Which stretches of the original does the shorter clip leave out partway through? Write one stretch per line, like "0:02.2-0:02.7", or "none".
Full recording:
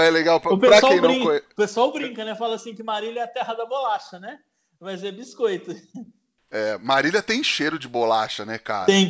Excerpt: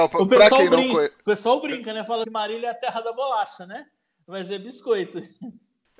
0:02.5-0:02.8